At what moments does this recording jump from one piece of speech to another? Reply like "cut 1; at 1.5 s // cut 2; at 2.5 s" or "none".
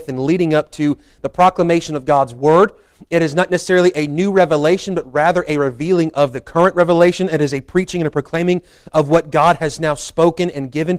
none